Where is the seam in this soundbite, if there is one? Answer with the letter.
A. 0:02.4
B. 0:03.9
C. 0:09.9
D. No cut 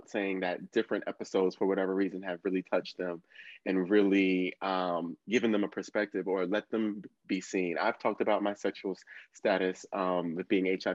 D